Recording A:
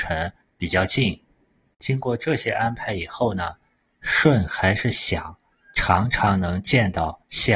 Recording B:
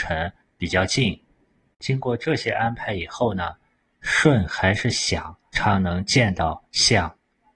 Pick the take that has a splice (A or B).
B